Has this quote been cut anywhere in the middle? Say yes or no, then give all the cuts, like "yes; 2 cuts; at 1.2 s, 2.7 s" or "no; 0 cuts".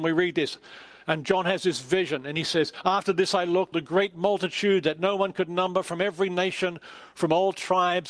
yes; 1 cut; at 3.7 s